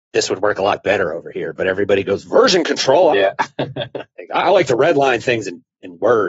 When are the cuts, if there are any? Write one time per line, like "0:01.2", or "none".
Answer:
0:03.1